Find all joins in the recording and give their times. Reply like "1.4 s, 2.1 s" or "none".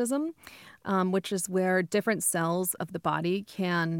none